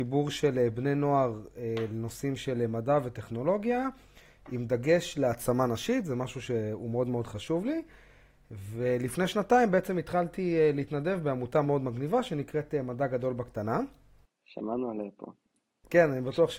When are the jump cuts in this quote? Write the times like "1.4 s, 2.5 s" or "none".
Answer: 11.6 s